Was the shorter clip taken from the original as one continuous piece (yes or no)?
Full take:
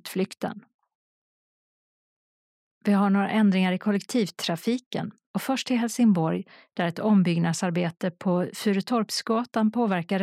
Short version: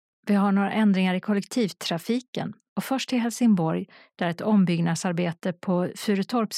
yes